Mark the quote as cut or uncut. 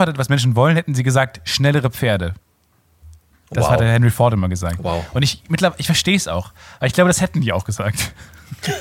uncut